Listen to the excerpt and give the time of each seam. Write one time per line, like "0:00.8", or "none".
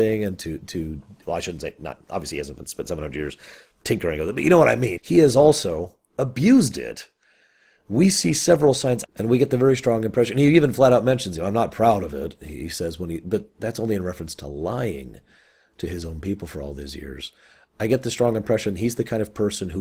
0:05.0
0:09.0